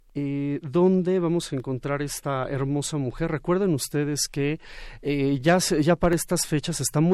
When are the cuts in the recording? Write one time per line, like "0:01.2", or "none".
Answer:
none